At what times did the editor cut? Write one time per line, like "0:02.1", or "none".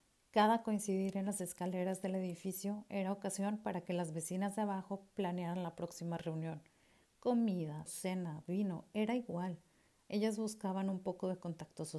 0:07.9